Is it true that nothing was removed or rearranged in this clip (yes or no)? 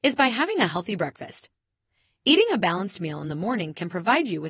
yes